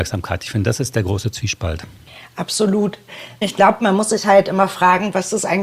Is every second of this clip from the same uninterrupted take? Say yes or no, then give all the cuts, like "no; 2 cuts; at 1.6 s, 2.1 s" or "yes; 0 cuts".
yes; 0 cuts